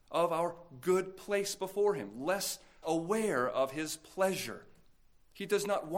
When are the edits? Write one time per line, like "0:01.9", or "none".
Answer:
0:02.8

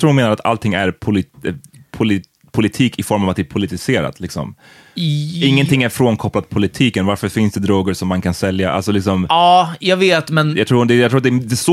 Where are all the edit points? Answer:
none

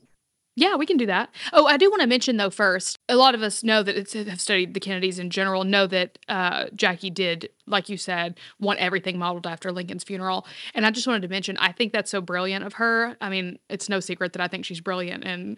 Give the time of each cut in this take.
none

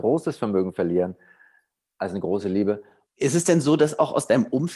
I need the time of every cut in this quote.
0:03.1

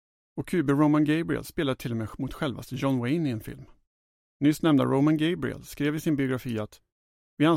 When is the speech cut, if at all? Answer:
0:01.4
0:04.3

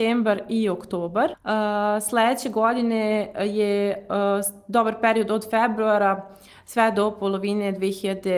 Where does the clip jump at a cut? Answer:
0:01.3

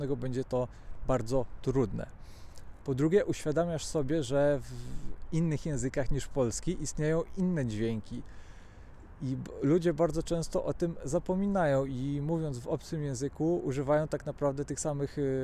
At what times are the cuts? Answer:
none

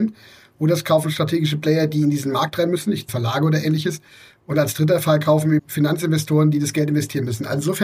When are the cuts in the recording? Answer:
0:03.1
0:05.6

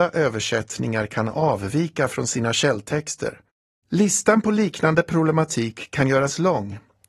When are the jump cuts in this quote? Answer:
0:03.8

